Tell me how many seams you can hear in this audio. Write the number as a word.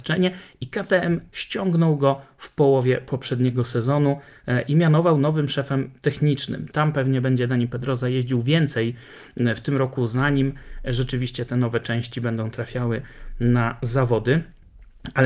one